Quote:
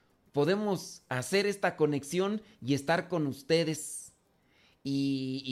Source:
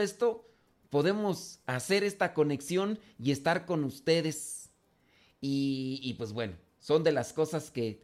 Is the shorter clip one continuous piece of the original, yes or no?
yes